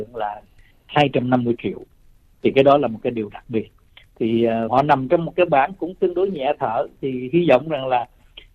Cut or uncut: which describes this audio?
cut